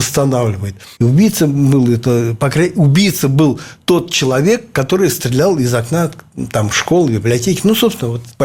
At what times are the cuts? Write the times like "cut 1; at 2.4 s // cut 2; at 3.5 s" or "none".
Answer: cut 1; at 1.0 s